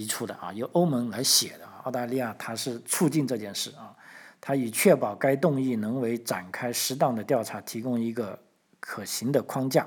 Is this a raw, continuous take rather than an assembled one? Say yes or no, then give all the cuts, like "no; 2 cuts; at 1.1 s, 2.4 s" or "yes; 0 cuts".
yes; 0 cuts